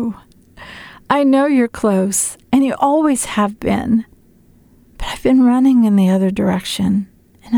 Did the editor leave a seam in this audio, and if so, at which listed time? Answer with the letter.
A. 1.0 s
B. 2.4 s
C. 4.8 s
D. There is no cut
D